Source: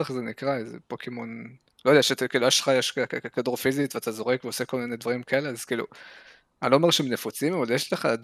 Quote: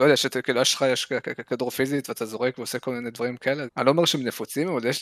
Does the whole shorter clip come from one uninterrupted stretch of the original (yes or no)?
no